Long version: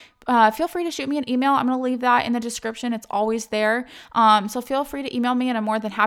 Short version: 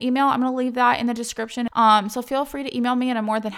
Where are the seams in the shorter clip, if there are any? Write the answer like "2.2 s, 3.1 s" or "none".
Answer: 1.7 s